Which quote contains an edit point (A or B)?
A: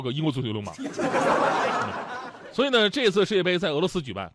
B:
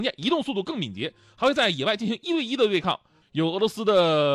B